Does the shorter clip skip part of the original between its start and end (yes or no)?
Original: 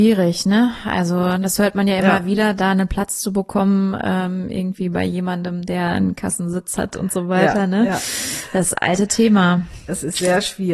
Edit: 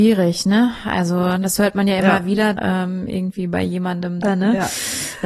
yes